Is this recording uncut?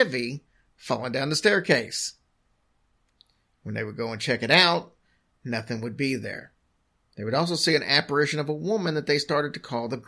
yes; 0 cuts

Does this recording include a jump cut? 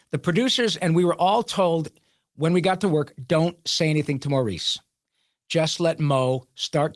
no; 0 cuts

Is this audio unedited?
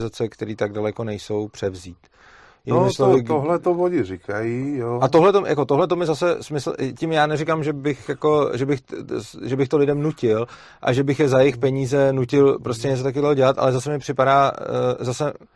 yes; 0 cuts

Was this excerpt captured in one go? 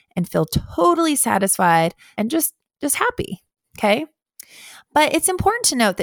no; 1 cut; at 2.1 s

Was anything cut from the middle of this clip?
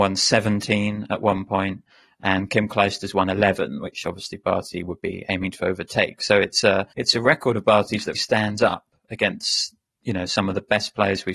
yes; 2 cuts; at 6.9 s, 8.1 s

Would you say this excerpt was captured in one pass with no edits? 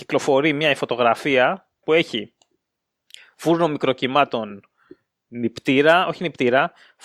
no; 1 cut; at 1.8 s

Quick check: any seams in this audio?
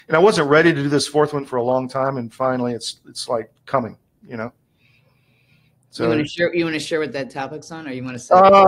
yes; 1 cut; at 3.6 s

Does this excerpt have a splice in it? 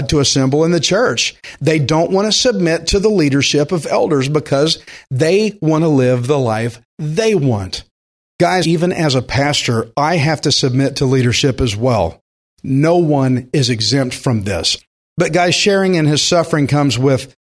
yes; 1 cut; at 8.6 s

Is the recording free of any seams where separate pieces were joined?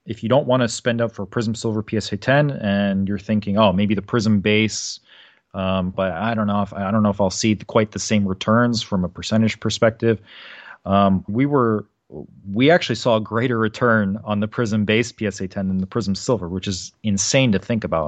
no; 2 cuts; at 5.9 s, 11.3 s

